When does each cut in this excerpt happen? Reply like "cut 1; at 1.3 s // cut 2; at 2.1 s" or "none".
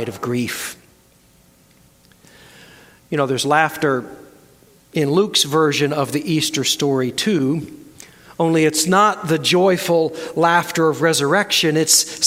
none